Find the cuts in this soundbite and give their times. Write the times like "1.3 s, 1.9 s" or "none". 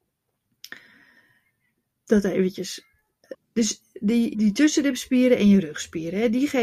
3.3 s, 4.3 s